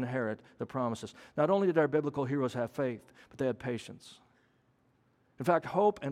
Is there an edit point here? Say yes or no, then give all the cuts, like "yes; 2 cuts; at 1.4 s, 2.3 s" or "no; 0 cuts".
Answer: no; 0 cuts